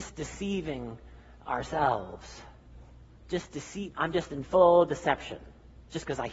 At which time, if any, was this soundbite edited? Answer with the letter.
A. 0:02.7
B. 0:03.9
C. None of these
B